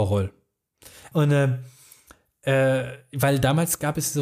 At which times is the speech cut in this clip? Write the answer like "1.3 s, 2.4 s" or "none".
1.1 s